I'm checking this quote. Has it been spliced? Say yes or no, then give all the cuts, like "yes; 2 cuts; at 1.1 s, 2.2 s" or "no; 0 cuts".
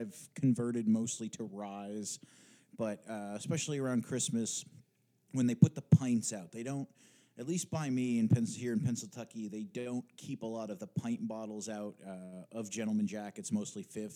no; 0 cuts